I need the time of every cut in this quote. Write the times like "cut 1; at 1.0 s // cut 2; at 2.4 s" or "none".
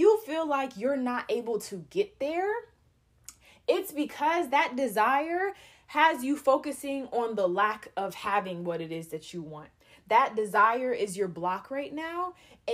none